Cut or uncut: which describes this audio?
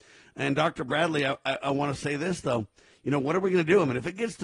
uncut